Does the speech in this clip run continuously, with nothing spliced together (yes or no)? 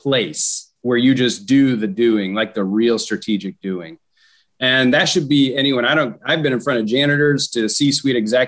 yes